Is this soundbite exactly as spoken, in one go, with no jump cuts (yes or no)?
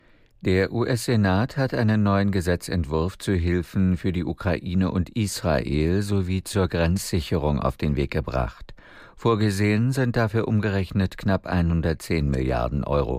yes